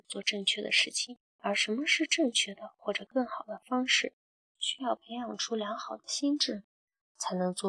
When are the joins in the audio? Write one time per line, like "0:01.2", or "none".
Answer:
0:01.3
0:04.5